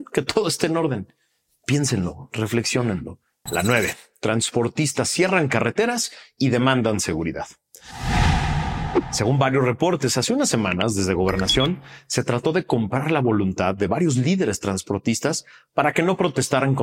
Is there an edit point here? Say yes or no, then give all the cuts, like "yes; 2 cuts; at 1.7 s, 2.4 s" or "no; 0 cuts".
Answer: yes; 1 cut; at 3.5 s